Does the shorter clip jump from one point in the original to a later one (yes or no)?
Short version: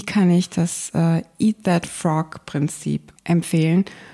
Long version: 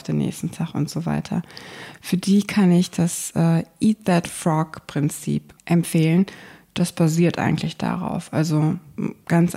no